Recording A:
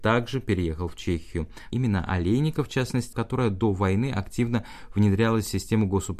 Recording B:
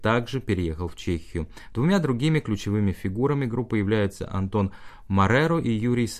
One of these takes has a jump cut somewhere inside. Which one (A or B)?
A